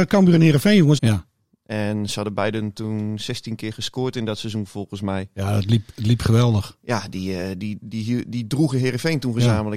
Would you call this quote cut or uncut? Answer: cut